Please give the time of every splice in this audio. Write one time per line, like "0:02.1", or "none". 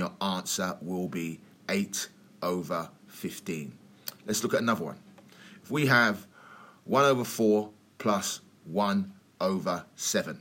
none